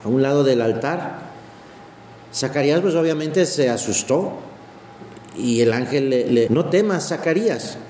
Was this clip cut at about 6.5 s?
yes; 1 cut; at 6.5 s

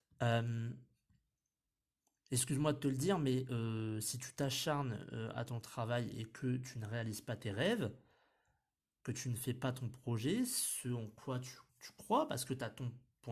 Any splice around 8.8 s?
no; 1 cut; at 11.7 s

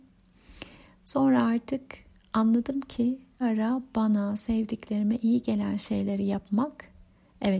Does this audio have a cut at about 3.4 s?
yes; 1 cut; at 3.4 s

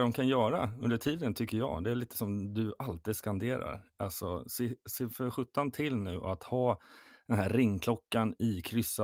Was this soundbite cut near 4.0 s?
no; 0 cuts

